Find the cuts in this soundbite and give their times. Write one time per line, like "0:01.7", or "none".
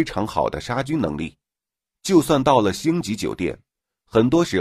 0:01.9